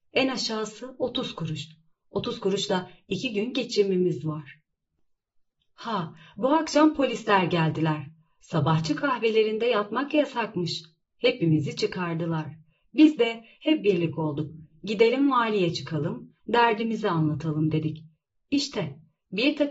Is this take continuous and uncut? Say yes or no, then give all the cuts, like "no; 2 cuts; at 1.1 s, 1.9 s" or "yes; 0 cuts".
no; 1 cut; at 16.4 s